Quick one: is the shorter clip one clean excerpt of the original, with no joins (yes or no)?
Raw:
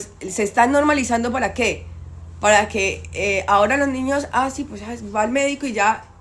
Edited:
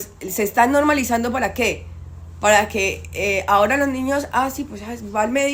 yes